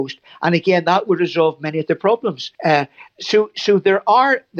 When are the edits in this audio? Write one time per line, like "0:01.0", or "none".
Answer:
0:02.5